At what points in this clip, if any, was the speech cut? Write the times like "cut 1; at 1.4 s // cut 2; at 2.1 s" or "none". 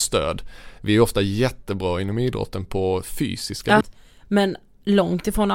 cut 1; at 3.8 s